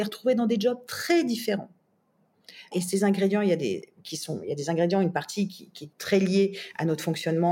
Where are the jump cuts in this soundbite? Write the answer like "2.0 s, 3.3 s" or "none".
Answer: 2.7 s, 5.9 s